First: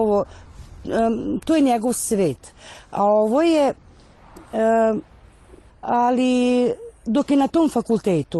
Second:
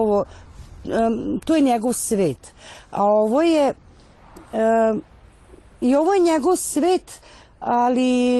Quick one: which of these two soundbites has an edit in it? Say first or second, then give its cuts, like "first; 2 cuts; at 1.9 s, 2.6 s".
first; 1 cut; at 5.7 s